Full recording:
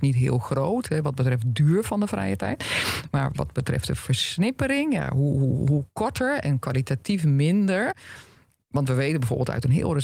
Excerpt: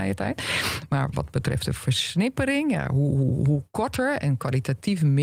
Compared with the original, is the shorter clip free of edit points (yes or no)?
yes